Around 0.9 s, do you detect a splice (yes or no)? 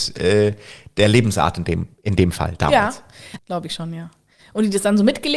no